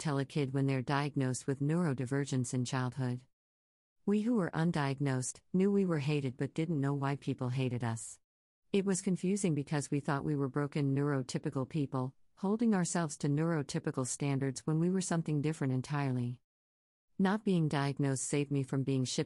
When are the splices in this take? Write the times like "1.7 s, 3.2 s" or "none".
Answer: 5.5 s